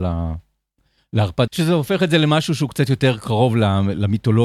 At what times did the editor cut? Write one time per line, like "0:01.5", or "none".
0:01.5